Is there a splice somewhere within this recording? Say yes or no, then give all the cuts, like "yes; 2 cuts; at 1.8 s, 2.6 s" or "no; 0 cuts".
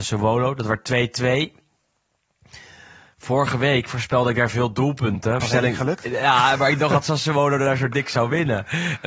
yes; 1 cut; at 5.4 s